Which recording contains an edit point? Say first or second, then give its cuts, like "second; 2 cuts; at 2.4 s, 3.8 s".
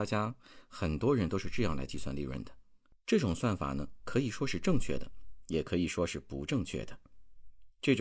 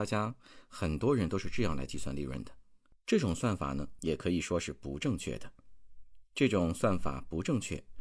second; 1 cut; at 4.0 s